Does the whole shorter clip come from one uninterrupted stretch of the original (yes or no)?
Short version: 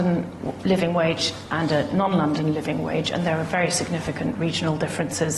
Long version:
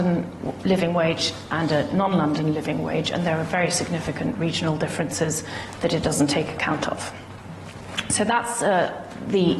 yes